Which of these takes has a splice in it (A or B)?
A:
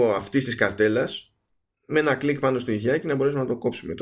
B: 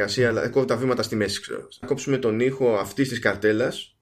B